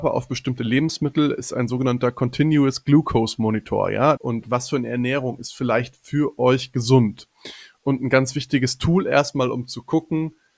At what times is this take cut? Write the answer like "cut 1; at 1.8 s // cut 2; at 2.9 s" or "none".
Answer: cut 1; at 4.2 s